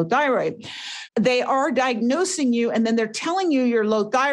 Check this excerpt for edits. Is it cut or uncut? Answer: cut